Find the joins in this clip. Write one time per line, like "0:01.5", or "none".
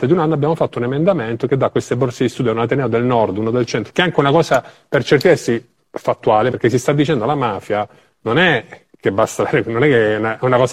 0:03.9
0:06.5